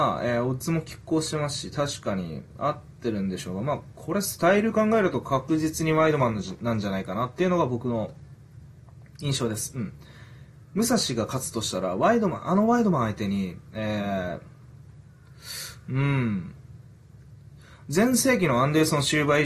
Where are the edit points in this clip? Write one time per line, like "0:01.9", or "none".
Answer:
none

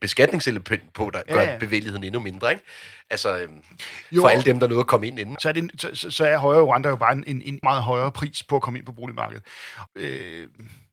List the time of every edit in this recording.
0:05.4
0:07.6
0:09.9

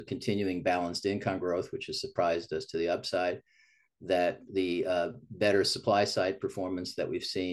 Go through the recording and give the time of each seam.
none

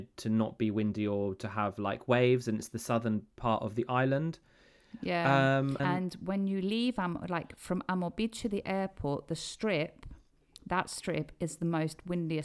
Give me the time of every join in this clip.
0:05.8

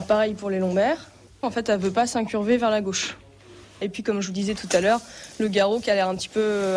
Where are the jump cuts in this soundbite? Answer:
0:01.4
0:03.8

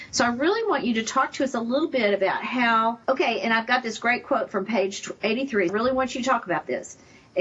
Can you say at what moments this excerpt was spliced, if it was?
0:03.0
0:05.7

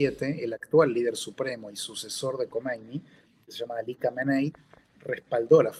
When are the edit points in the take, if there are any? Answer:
none

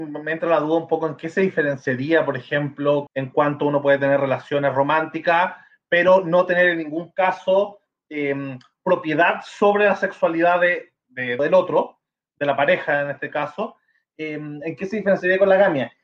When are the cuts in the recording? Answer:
0:03.1
0:11.4

